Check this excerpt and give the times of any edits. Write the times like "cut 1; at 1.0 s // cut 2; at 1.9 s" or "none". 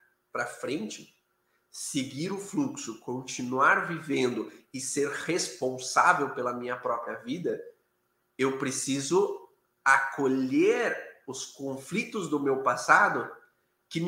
none